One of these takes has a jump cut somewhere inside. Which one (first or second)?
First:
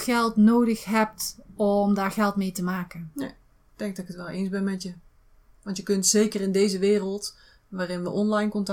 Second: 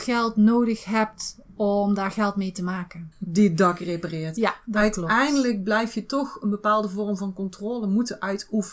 second